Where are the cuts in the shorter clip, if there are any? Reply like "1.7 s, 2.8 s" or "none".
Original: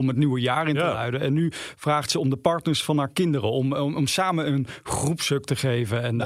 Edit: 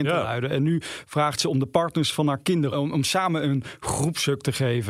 2.7 s